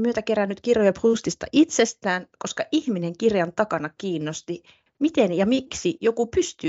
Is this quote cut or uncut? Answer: cut